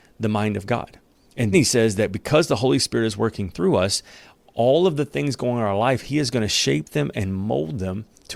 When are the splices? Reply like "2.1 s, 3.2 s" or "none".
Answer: 1.5 s